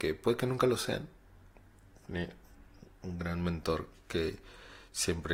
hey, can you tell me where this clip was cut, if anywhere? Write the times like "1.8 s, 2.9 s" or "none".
none